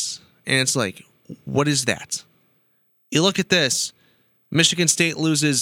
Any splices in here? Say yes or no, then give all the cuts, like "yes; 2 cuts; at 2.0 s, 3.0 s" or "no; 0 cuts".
no; 0 cuts